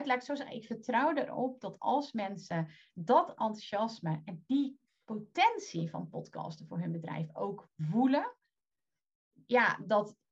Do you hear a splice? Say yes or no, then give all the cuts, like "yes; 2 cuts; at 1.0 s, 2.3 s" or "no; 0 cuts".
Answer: no; 0 cuts